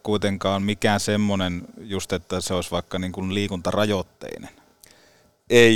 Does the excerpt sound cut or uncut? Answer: uncut